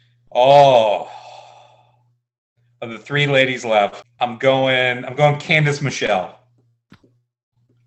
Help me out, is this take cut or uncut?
uncut